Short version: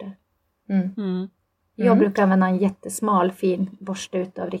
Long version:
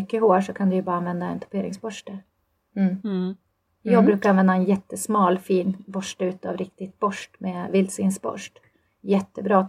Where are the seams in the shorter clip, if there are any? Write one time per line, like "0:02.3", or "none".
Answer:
none